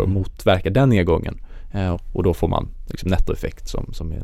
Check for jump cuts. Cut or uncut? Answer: cut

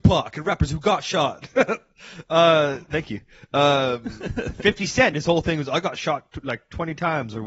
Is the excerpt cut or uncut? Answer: uncut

